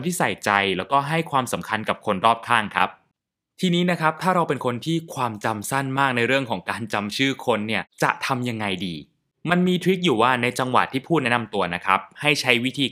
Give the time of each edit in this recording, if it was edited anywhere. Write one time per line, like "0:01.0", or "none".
none